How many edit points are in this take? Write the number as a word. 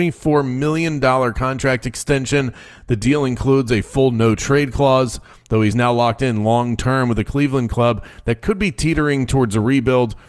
zero